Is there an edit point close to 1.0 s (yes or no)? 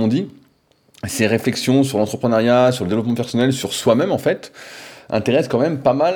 no